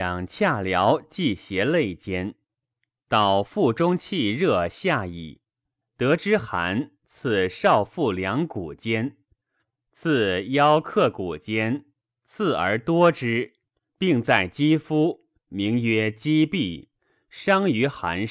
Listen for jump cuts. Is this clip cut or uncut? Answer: cut